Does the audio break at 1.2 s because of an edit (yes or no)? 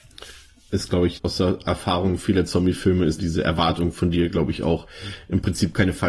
yes